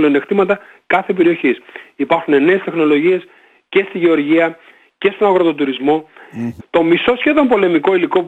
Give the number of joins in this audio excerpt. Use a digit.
1